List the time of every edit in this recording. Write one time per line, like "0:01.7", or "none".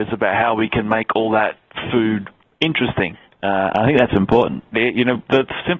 0:04.7